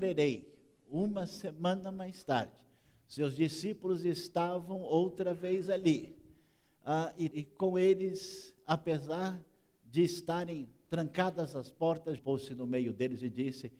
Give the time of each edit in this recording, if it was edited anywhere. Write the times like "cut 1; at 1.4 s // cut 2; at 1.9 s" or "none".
cut 1; at 7.3 s // cut 2; at 12.2 s